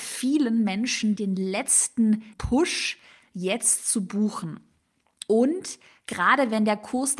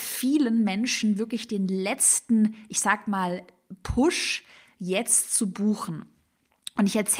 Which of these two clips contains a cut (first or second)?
first